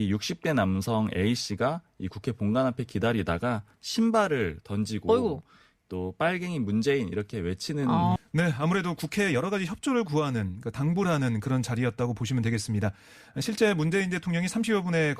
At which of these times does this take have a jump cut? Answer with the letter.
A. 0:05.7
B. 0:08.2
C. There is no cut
B